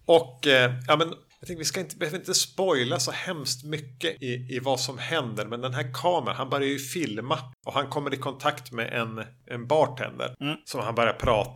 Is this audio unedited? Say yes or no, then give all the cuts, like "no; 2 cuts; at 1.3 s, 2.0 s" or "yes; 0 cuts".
yes; 0 cuts